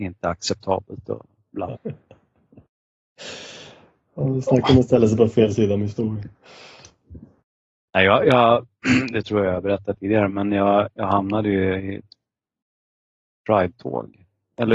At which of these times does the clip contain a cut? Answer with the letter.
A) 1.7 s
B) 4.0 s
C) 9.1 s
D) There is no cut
A